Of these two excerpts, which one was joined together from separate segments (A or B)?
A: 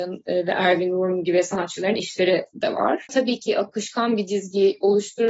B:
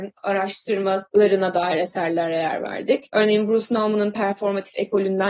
A